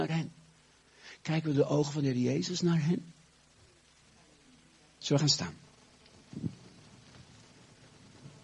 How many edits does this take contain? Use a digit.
1